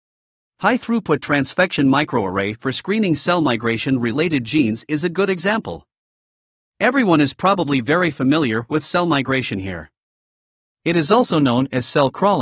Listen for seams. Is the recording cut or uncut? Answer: uncut